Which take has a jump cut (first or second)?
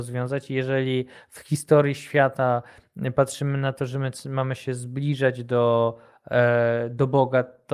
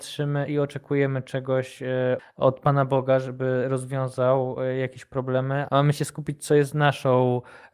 second